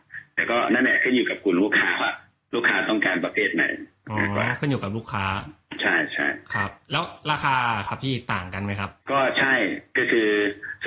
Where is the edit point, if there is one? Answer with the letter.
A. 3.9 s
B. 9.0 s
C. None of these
B